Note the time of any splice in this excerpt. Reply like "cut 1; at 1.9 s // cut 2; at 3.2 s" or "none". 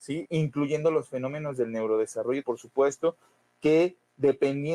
cut 1; at 2.4 s